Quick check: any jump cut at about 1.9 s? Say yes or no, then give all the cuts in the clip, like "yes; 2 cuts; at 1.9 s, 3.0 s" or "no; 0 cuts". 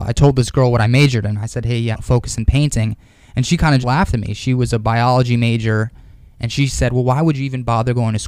yes; 2 cuts; at 1.9 s, 3.8 s